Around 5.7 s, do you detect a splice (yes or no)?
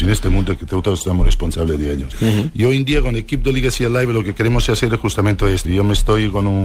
yes